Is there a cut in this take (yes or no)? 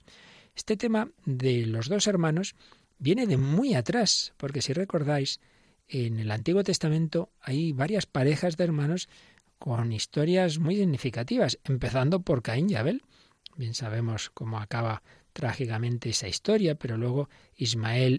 no